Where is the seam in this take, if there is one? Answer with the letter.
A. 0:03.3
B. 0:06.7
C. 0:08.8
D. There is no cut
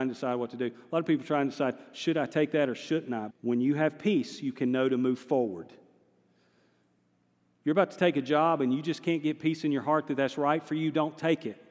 A